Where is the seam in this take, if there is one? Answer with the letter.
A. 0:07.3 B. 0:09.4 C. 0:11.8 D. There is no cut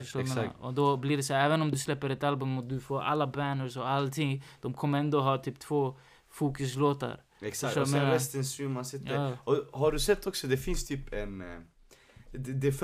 D